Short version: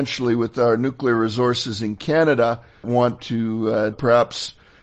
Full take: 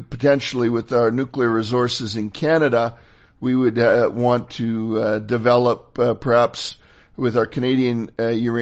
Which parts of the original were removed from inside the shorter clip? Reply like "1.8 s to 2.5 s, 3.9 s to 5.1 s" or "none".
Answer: 3.2 s to 4.1 s, 5.2 s to 6.2 s